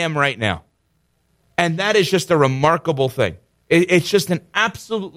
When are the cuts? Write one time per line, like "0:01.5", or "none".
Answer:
none